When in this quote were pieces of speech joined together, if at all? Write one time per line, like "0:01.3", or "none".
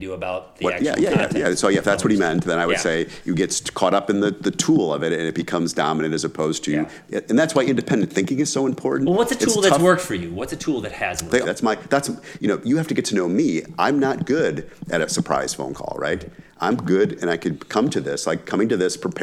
0:11.4